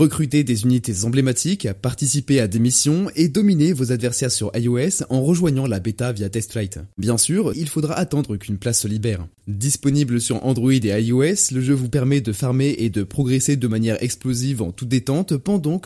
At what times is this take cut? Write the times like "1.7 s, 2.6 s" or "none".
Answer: 7.5 s, 9.4 s